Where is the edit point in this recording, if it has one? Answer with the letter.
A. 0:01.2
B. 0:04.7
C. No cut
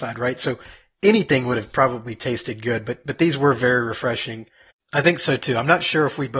B